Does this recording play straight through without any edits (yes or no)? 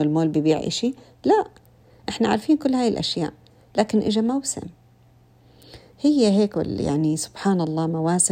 yes